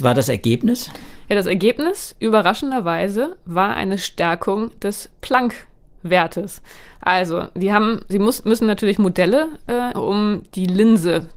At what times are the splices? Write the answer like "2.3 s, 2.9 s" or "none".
9.9 s